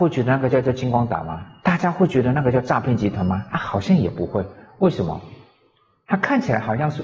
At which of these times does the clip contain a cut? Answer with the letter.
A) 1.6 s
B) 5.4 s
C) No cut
A